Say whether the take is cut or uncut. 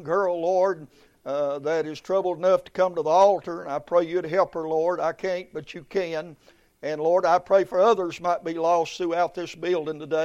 uncut